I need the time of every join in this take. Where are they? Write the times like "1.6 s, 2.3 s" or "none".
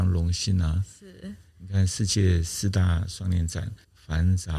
none